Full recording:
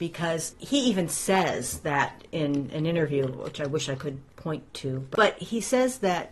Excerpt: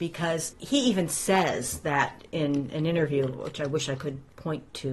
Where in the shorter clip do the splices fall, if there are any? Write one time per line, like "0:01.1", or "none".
none